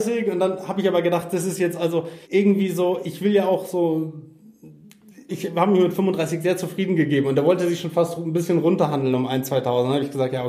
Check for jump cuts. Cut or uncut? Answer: cut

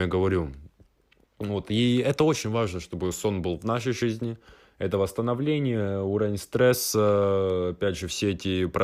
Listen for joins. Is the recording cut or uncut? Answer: uncut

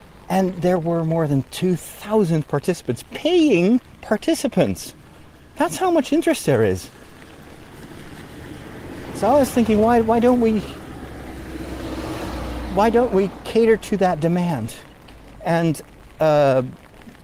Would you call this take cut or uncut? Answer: uncut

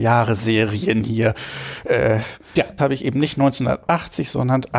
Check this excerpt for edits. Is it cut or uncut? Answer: cut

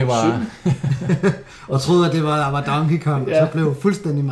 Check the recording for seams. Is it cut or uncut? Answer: uncut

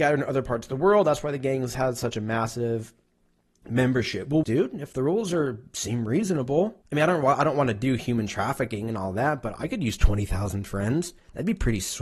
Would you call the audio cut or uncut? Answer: cut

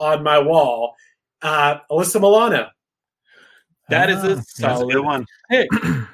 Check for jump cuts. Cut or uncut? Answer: uncut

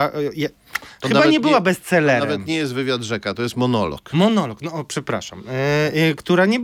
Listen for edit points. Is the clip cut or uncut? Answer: uncut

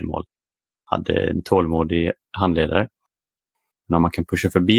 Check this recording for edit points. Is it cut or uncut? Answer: cut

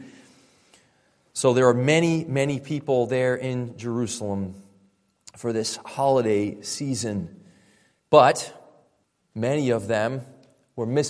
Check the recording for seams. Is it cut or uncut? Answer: uncut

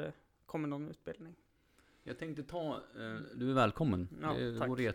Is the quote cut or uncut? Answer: uncut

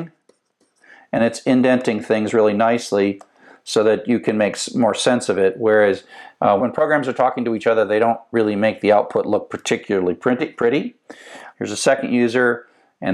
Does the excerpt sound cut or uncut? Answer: cut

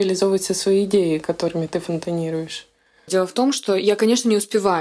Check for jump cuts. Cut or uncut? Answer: cut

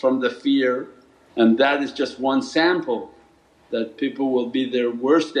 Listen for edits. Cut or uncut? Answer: cut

